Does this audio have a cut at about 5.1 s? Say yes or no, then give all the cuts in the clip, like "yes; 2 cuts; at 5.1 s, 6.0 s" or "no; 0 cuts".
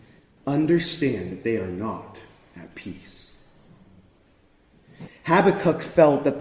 yes; 1 cut; at 5.1 s